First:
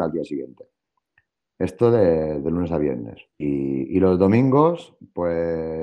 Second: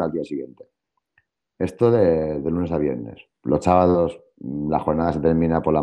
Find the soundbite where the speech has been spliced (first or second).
first